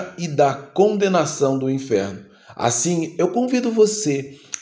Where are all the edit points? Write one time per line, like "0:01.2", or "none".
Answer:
none